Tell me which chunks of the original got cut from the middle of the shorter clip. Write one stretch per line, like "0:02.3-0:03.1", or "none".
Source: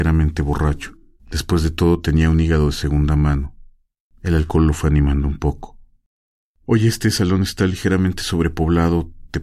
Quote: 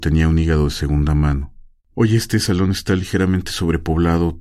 0:03.8-0:06.5